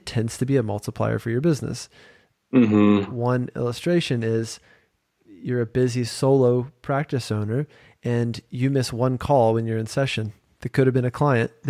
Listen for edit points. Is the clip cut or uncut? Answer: uncut